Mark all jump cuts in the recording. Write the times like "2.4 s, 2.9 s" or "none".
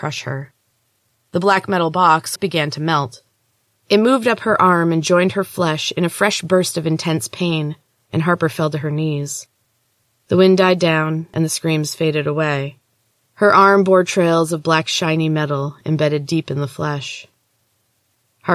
2.4 s, 13.3 s